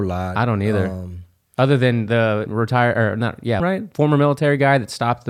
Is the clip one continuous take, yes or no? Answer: no